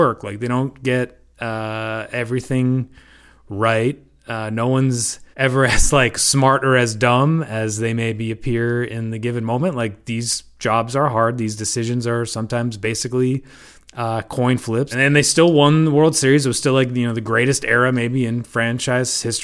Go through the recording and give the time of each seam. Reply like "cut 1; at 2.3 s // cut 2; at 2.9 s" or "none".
cut 1; at 5.3 s // cut 2; at 14.9 s